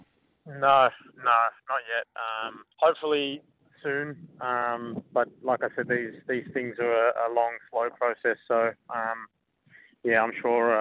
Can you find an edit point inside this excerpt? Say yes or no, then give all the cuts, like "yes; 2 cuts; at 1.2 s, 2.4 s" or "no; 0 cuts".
yes; 1 cut; at 2.7 s